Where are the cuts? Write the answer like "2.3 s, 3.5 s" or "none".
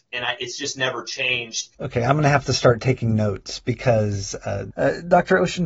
1.7 s, 4.7 s